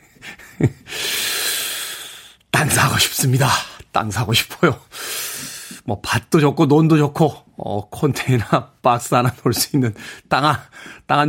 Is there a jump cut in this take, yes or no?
no